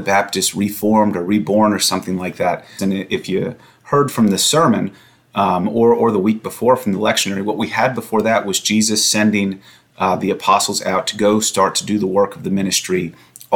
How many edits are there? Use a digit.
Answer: 1